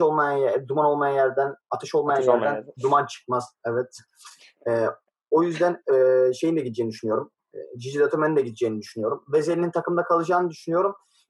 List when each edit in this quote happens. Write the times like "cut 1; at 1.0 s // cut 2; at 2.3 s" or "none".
none